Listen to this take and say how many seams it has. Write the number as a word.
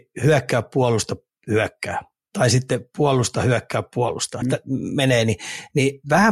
one